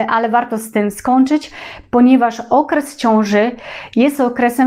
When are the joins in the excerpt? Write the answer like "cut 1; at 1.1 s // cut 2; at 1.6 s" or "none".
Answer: none